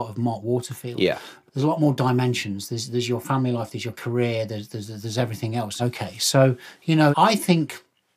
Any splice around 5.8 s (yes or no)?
yes